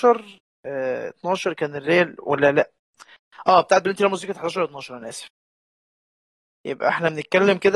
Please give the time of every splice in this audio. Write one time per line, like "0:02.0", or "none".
none